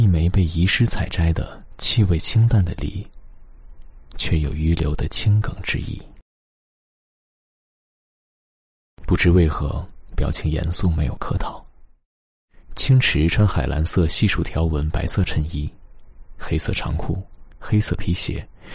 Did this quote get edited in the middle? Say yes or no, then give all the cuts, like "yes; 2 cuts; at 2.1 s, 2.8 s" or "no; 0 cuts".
yes; 1 cut; at 9.0 s